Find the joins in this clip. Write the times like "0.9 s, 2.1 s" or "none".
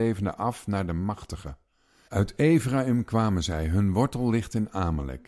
2.1 s

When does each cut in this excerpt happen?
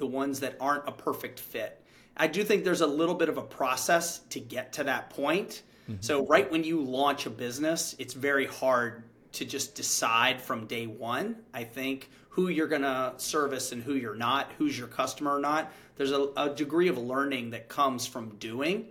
none

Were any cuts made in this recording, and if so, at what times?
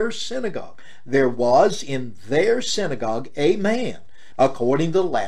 4.3 s

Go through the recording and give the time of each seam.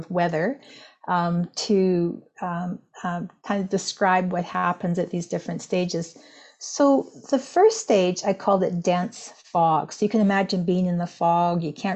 none

